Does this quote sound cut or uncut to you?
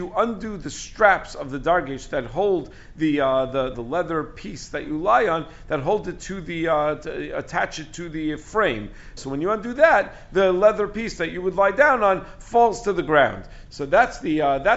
cut